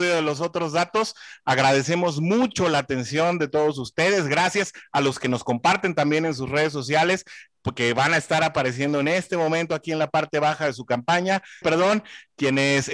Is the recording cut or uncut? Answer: cut